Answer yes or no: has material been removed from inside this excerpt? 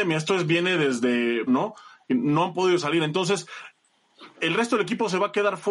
yes